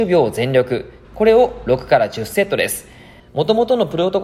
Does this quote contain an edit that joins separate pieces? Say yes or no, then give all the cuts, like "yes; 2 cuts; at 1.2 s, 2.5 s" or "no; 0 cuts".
yes; 2 cuts; at 1.0 s, 3.2 s